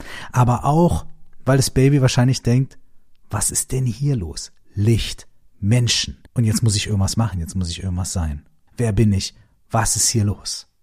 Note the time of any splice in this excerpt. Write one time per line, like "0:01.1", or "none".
0:06.3
0:08.7